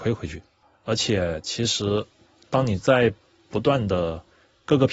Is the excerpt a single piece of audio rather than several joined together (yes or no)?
yes